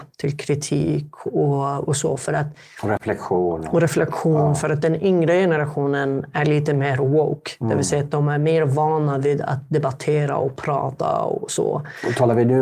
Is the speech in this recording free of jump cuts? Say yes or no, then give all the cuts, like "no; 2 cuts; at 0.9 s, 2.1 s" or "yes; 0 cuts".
yes; 0 cuts